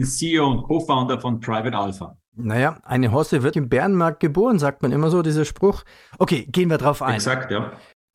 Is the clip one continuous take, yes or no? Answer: no